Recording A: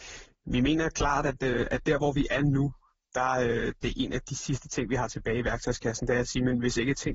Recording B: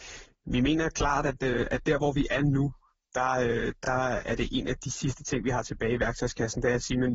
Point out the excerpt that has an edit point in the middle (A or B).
A